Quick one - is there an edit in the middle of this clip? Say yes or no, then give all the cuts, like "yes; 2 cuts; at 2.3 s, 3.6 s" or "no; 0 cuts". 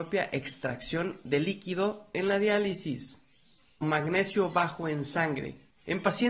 yes; 1 cut; at 3.8 s